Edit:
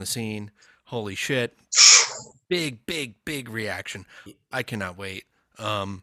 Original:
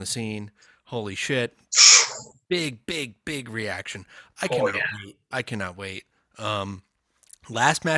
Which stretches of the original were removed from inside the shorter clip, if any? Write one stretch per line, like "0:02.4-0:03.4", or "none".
0:04.3-0:05.1